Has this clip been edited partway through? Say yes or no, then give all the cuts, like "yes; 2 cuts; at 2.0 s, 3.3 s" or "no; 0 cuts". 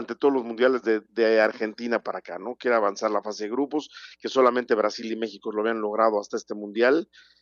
no; 0 cuts